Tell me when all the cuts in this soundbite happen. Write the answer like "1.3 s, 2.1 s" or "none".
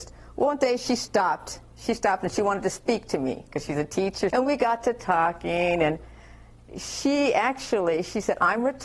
4.3 s, 6.7 s